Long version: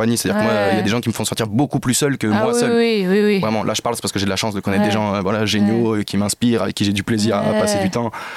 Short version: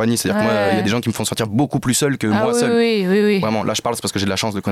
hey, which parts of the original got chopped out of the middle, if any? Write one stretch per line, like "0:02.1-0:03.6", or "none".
none